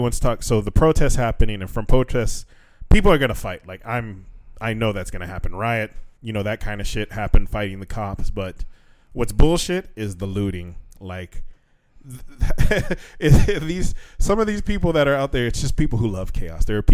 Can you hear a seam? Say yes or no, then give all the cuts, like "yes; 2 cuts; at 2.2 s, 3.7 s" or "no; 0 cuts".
yes; 1 cut; at 6.1 s